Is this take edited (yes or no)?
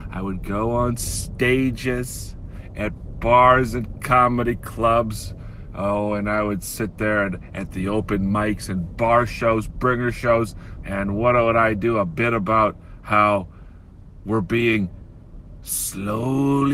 yes